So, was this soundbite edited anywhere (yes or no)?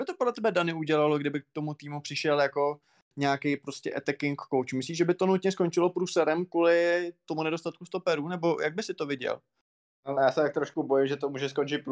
no